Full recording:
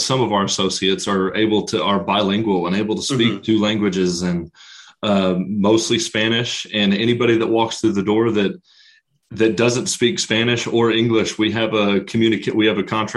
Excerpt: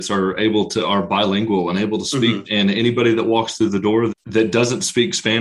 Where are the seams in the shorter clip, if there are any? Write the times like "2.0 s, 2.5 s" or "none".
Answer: 2.4 s, 4.1 s